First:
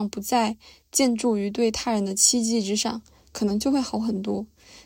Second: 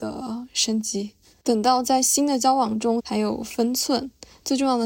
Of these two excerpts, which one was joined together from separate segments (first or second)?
second